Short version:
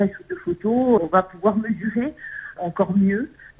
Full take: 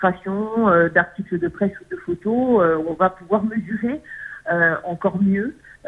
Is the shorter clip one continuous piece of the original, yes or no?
no